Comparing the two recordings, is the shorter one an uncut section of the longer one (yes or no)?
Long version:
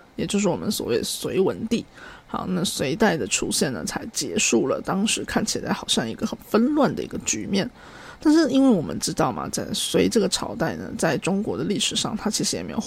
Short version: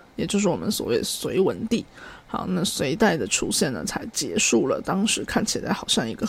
yes